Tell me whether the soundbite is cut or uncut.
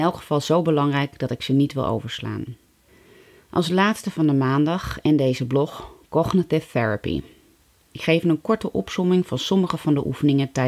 cut